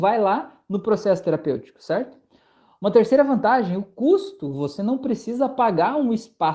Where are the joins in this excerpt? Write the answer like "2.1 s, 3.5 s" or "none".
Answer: none